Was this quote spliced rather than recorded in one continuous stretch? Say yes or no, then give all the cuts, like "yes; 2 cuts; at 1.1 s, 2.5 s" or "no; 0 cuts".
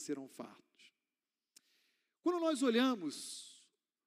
no; 0 cuts